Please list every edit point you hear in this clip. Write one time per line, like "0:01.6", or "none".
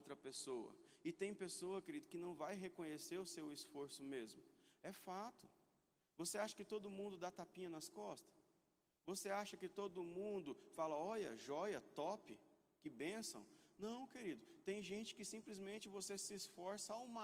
none